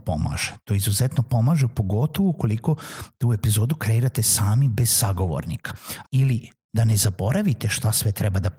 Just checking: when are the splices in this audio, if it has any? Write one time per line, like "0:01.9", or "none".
0:06.0